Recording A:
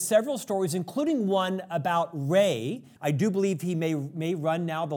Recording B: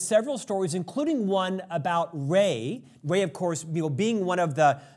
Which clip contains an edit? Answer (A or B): A